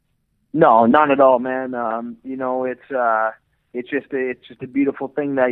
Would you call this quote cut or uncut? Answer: uncut